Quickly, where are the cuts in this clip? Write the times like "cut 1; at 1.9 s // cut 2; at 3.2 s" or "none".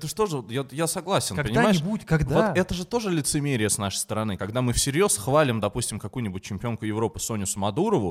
none